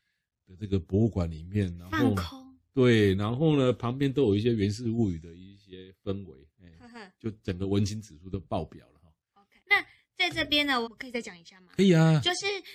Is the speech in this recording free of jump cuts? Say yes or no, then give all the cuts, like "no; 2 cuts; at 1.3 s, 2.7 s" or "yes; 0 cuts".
no; 2 cuts; at 9.6 s, 10.8 s